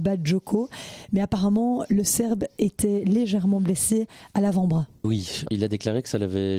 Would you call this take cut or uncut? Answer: cut